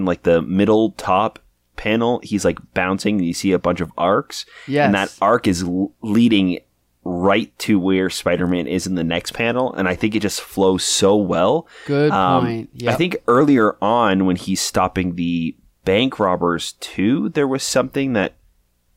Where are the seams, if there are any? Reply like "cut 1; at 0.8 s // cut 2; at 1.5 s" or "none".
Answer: none